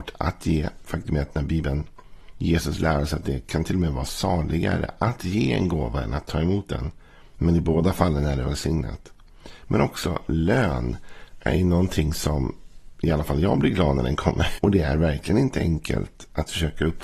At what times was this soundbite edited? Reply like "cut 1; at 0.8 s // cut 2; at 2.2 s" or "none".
cut 1; at 14.6 s